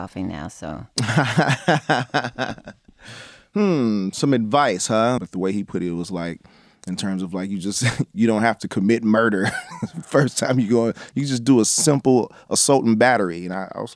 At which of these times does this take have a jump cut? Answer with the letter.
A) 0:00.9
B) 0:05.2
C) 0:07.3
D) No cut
B